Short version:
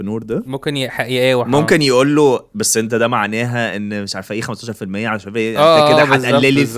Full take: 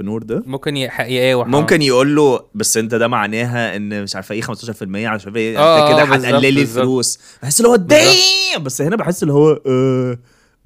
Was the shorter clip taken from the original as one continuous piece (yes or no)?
yes